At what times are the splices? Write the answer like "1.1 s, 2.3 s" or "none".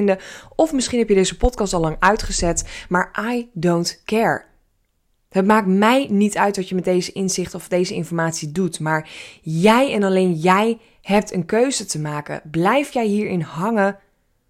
none